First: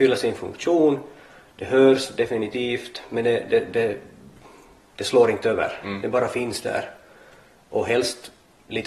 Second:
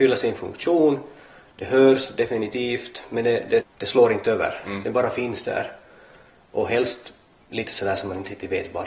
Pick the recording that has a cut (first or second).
second